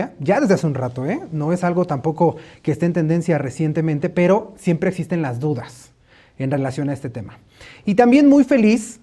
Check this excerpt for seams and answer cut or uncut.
uncut